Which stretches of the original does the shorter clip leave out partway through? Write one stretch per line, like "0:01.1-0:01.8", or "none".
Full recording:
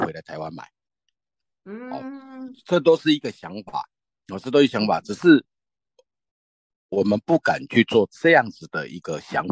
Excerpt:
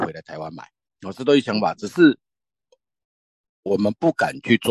0:01.0-0:04.2

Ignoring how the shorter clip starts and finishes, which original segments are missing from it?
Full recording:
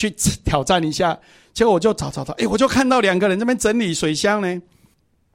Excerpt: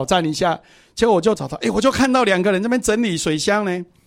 0:01.9-0:02.1

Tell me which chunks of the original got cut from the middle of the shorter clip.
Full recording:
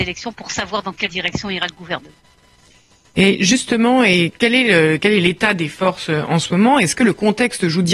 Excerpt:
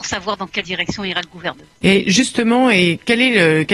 0:02.2-0:03.1

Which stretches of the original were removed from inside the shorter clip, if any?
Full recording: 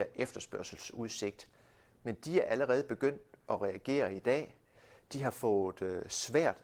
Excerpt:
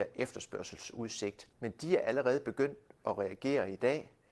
0:01.5-0:02.0

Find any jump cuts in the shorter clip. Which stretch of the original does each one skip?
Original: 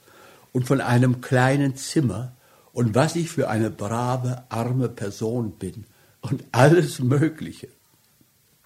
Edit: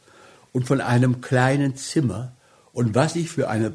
none

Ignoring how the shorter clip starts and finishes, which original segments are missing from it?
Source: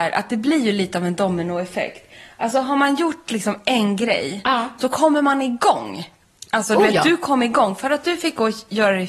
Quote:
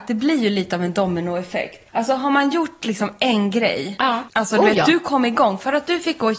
0:02.1-0:02.3
0:04.7-0:06.5

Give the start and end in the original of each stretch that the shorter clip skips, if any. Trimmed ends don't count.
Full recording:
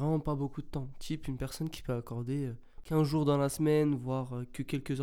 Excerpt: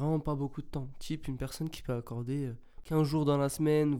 none

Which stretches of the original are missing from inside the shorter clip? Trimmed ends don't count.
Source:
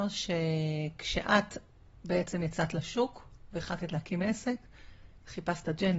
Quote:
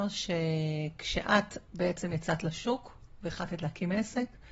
0:01.7-0:02.0

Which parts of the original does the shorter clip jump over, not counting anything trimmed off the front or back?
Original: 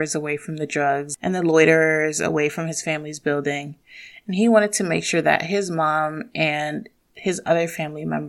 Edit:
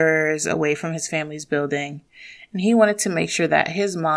none

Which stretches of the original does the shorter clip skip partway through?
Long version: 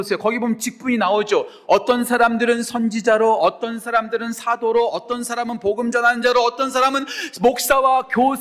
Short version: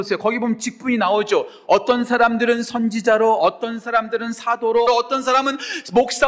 0:04.9-0:06.3

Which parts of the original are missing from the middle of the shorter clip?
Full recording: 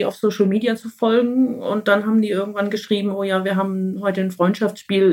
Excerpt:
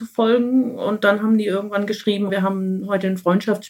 0:03.1-0:03.4

